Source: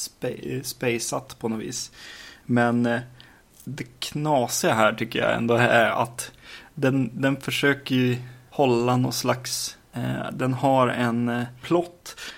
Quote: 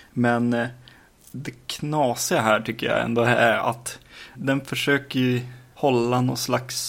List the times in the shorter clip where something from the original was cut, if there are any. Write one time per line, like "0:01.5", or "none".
0:04.3